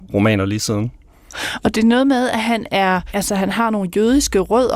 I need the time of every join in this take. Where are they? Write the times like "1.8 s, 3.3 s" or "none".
none

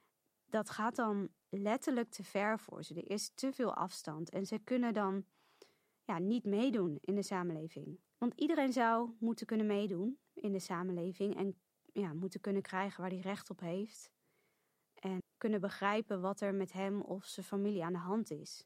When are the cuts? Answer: 8.0 s, 15.2 s

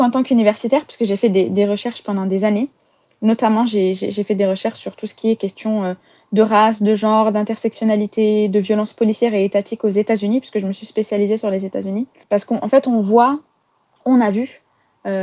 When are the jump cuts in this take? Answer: 12.2 s

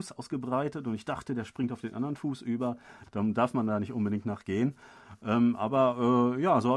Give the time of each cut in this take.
3.1 s

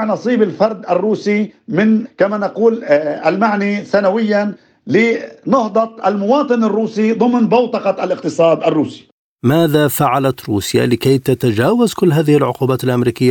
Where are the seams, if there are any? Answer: none

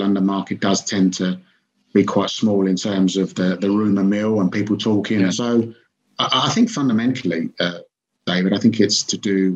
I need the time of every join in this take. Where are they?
5.3 s

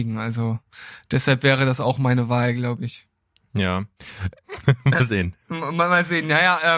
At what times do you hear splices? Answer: 4.4 s

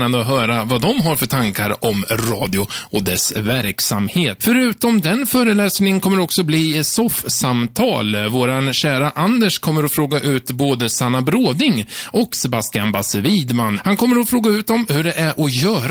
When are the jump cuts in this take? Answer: 4.4 s

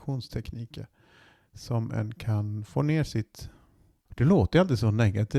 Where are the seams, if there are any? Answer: 4.0 s

